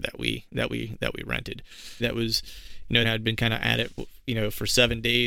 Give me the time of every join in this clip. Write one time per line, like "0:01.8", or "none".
0:02.0
0:03.0